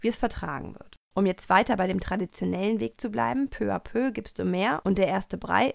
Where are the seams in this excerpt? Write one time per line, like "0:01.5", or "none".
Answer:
0:01.1